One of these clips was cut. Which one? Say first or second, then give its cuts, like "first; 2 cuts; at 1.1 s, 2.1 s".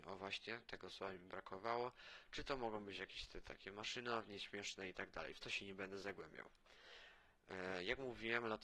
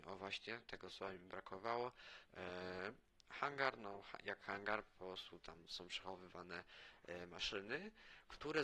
second; 1 cut; at 2.2 s